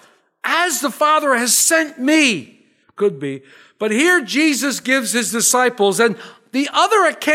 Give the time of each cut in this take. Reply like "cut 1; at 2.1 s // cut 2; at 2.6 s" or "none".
cut 1; at 2.8 s

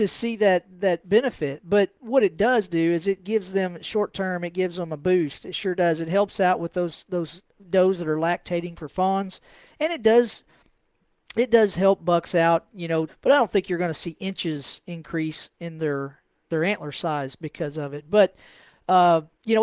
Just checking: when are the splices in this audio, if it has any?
cut 1; at 13.1 s

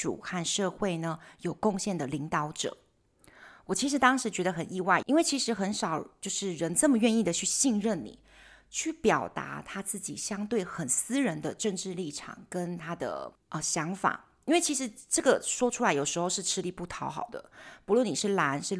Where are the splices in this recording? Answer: cut 1; at 5.0 s

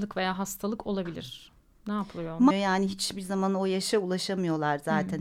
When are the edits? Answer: cut 1; at 2.5 s

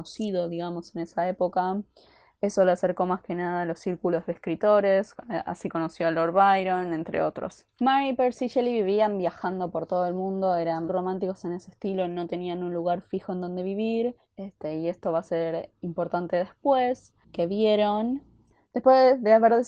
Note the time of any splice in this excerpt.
cut 1; at 10.9 s // cut 2; at 14.3 s // cut 3; at 17.2 s

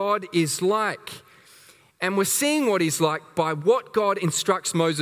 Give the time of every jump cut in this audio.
none

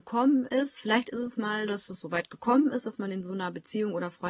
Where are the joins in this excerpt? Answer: cut 1; at 1.7 s

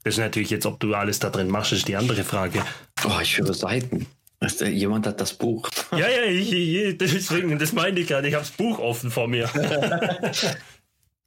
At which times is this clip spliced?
cut 1; at 3.0 s

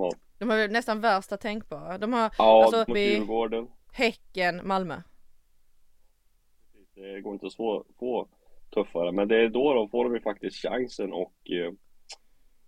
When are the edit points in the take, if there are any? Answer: cut 1; at 2.9 s

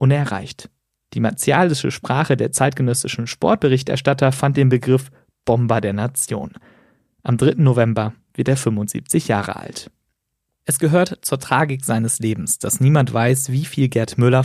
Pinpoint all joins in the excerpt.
none

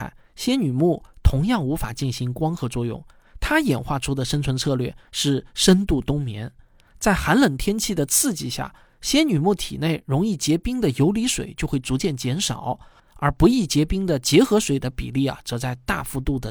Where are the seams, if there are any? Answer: none

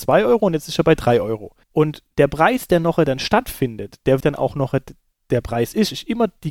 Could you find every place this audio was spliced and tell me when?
cut 1; at 1.6 s // cut 2; at 4.2 s

